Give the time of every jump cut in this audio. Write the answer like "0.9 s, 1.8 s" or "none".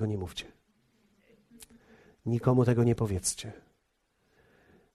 none